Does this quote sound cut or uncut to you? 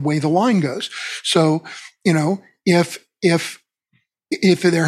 uncut